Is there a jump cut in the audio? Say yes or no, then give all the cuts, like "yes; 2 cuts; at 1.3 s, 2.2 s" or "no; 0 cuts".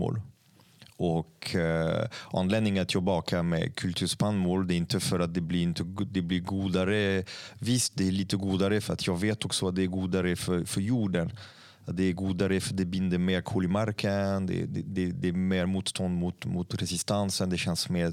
no; 0 cuts